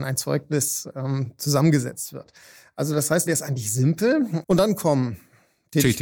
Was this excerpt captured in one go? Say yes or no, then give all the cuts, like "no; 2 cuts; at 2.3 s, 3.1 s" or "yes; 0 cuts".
no; 2 cuts; at 3.3 s, 4.4 s